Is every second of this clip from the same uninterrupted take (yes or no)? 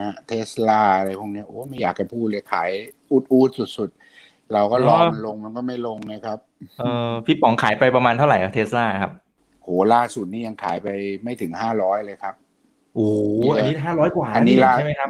yes